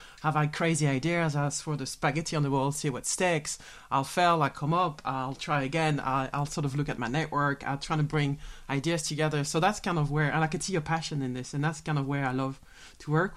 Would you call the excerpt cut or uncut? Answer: uncut